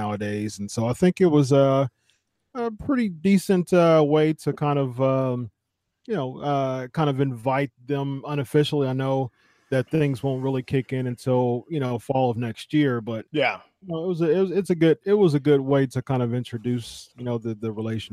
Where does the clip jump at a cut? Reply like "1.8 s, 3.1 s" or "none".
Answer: none